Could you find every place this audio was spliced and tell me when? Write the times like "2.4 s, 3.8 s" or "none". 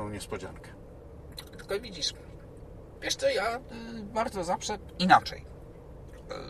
none

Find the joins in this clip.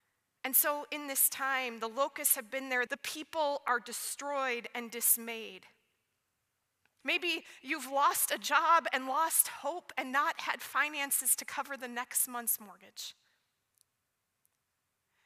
2.9 s, 7.0 s

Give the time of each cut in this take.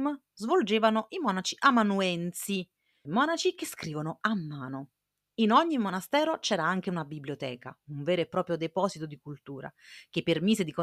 3.0 s

